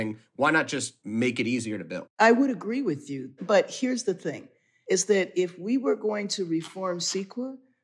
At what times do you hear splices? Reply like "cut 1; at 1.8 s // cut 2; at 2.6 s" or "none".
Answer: none